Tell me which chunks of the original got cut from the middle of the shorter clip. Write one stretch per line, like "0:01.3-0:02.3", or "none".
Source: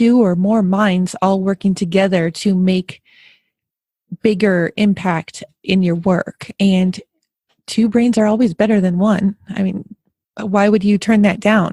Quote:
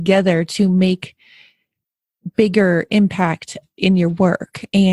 none

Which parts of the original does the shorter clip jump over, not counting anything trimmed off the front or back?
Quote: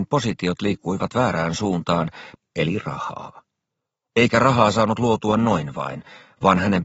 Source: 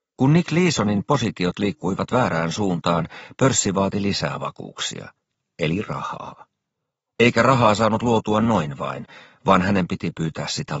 0:03.3-0:05.4

